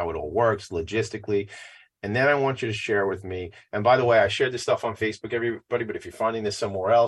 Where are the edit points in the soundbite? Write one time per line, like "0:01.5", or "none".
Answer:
none